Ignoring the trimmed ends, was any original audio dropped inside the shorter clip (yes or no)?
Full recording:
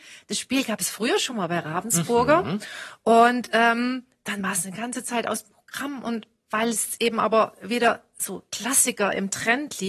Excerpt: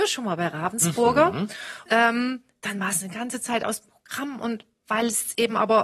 yes